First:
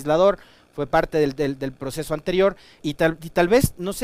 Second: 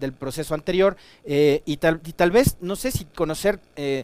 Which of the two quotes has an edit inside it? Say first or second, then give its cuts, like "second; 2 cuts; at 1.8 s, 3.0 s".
first; 1 cut; at 2.8 s